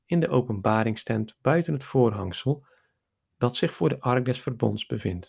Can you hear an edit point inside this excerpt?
no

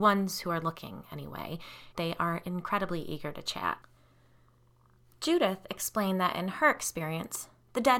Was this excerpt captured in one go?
no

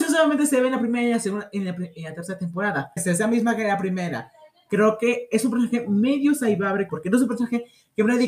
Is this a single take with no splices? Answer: no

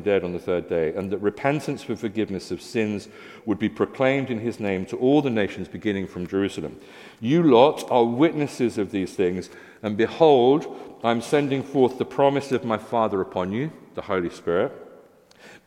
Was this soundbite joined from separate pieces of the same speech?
no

